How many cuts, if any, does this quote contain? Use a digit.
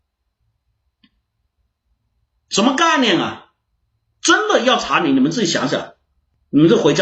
0